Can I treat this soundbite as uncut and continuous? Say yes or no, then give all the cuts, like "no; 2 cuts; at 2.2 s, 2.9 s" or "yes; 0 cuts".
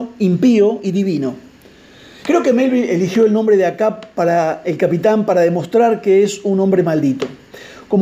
no; 1 cut; at 2.2 s